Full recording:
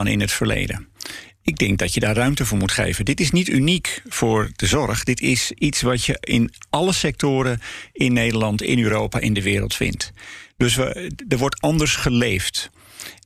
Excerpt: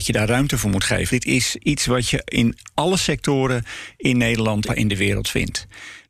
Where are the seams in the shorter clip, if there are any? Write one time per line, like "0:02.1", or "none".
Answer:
0:01.1
0:04.7